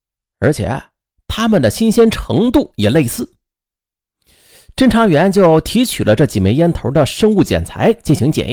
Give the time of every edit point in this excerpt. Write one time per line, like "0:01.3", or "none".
none